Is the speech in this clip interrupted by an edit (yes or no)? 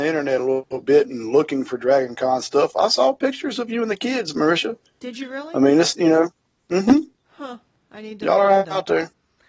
no